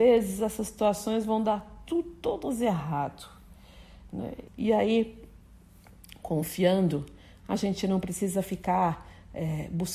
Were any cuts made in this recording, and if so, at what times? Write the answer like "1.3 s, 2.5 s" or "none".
4.5 s